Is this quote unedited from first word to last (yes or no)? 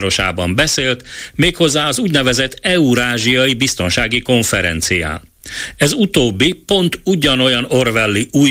yes